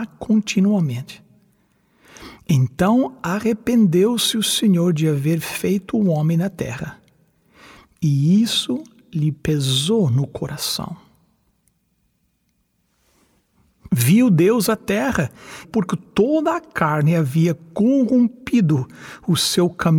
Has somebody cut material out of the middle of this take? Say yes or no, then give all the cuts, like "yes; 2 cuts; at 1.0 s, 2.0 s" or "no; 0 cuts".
yes; 2 cuts; at 13.9 s, 15.6 s